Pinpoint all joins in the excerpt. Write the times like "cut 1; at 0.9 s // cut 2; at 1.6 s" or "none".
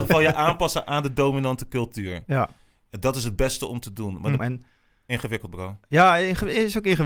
cut 1; at 4.4 s